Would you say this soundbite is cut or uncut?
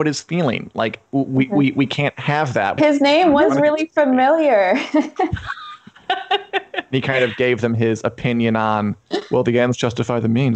cut